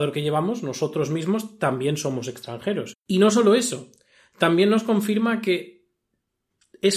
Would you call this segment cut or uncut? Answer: cut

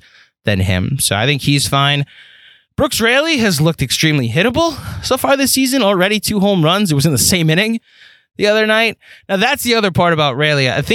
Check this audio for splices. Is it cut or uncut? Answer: uncut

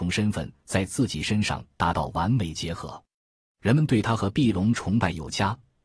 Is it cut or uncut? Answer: uncut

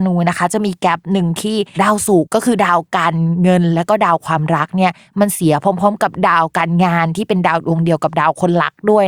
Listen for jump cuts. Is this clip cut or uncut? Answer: cut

